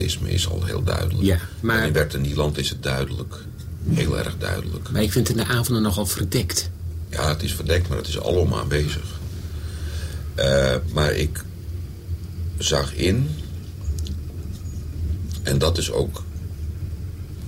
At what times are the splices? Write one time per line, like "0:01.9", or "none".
none